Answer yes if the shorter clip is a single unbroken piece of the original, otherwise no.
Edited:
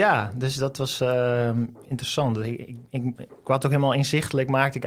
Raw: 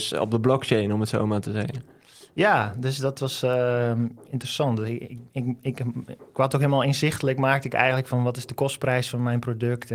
no